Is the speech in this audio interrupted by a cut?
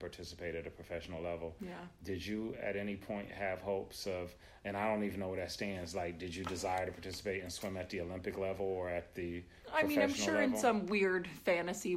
no; 0 cuts

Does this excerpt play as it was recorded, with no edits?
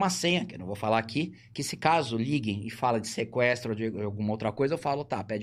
yes; 0 cuts

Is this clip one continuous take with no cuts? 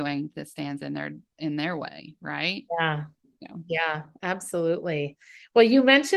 yes; 0 cuts

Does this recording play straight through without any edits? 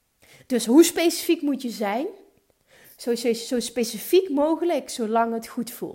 yes; 0 cuts

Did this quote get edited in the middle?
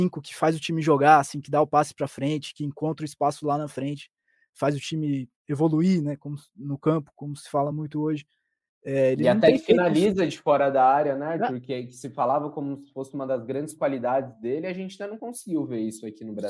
no; 0 cuts

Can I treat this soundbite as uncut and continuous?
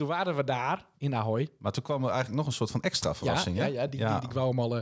yes; 0 cuts

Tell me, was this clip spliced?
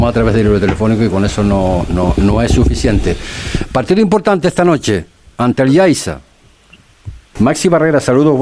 yes; 2 cuts; at 5.3 s, 7.4 s

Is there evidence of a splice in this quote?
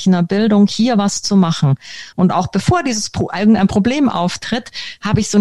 no; 0 cuts

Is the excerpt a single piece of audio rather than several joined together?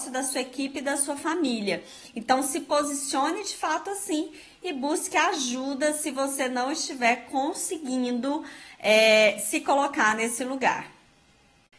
yes; 0 cuts

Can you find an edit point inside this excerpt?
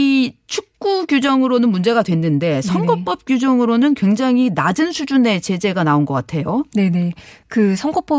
no; 0 cuts

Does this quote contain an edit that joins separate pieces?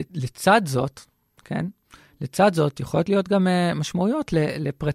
no; 0 cuts

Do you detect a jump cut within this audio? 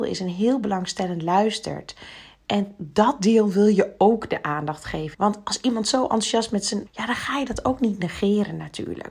yes; 2 cuts; at 5.1 s, 6.9 s

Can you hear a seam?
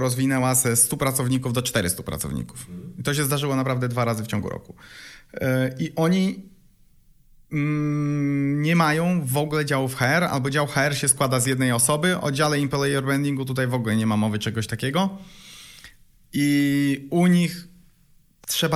no; 0 cuts

